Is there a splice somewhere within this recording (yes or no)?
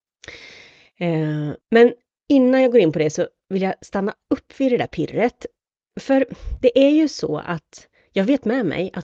yes